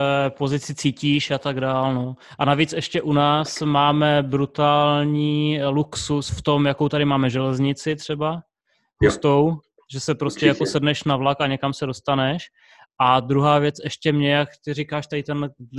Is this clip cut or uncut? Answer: uncut